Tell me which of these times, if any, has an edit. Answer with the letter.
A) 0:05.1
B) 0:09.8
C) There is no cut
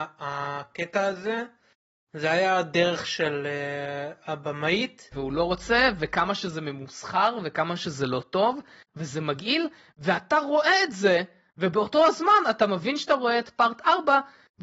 A